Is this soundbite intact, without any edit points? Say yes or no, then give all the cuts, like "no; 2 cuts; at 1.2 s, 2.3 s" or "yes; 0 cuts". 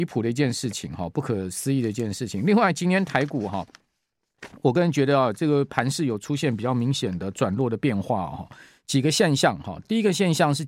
yes; 0 cuts